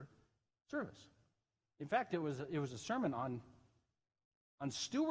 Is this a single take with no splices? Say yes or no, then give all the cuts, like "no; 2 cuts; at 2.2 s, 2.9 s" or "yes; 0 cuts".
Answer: yes; 0 cuts